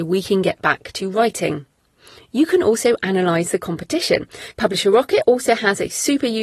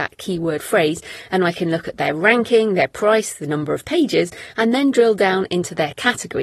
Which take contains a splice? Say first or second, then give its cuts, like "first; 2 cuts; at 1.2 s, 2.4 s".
first; 1 cut; at 4.5 s